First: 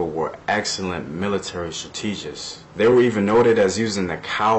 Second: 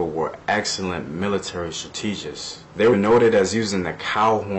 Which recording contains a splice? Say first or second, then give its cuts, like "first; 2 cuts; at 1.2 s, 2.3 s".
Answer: second; 1 cut; at 2.9 s